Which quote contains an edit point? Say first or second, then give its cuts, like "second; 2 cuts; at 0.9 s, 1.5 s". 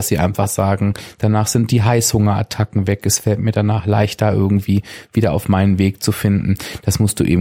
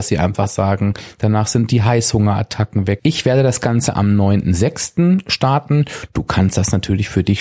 second; 1 cut; at 3.0 s